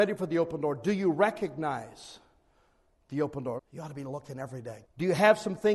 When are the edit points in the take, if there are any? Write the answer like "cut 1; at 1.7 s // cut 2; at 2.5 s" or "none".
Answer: cut 1; at 3.6 s // cut 2; at 4.8 s